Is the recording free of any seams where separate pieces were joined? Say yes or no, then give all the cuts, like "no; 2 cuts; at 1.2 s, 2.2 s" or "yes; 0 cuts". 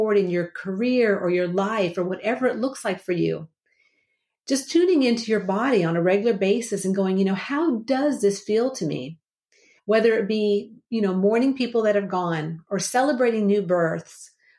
no; 1 cut; at 9.8 s